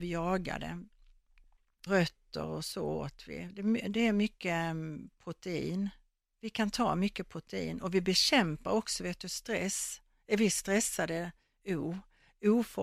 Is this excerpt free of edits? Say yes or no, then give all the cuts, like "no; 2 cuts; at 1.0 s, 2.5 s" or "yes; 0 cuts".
no; 1 cut; at 1.9 s